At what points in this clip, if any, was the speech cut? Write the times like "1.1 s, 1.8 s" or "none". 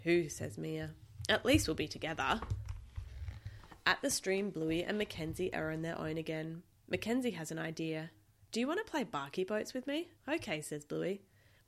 10.2 s